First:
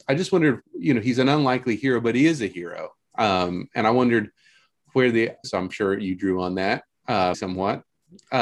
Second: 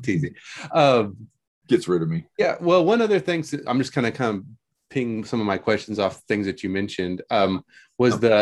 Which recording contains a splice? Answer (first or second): first